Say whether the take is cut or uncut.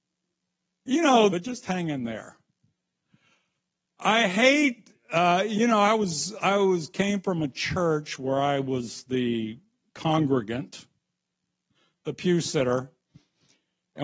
cut